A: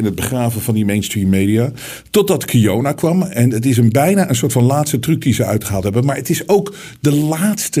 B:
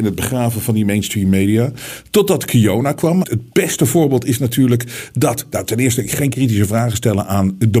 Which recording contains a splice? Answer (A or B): B